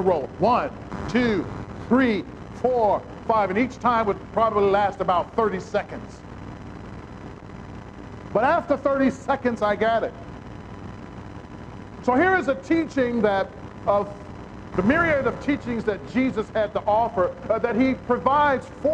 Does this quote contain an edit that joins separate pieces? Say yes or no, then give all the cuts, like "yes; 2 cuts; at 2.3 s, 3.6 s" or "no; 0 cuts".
no; 0 cuts